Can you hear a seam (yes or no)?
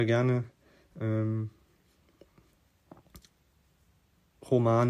no